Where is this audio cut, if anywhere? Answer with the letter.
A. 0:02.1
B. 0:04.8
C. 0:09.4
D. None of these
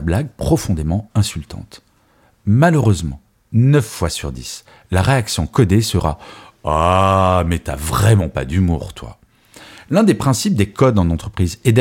D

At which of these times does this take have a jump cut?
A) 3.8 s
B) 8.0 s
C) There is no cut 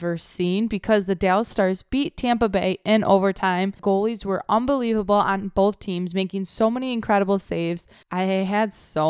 B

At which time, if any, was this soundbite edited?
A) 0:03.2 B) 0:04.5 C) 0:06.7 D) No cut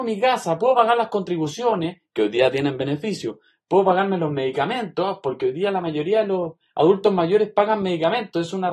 D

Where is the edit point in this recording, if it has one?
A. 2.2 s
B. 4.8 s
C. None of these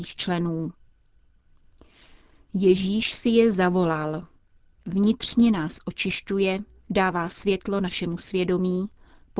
B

